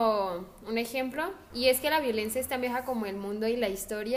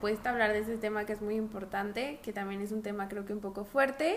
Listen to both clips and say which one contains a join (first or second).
first